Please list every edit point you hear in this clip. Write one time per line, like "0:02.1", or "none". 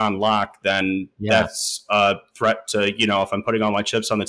none